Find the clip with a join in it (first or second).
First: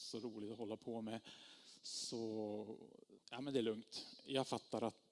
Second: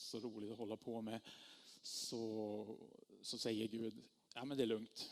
first